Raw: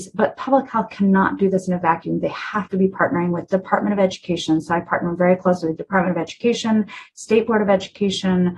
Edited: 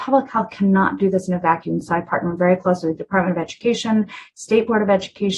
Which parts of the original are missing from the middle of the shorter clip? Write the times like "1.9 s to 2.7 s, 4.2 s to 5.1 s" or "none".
2.2 s to 4.6 s